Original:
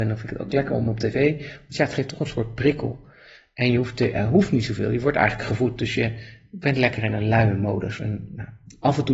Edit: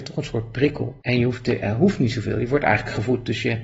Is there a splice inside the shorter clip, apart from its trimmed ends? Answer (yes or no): yes